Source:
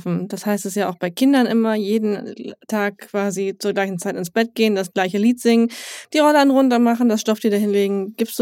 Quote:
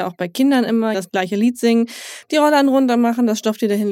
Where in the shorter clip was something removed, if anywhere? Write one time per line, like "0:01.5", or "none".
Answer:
0:00.9